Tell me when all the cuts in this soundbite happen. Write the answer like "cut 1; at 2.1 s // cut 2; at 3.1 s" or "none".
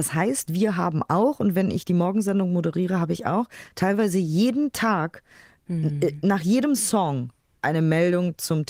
none